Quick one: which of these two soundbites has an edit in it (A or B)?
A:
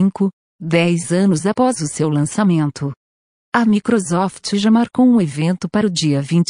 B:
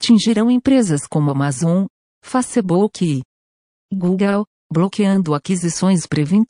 B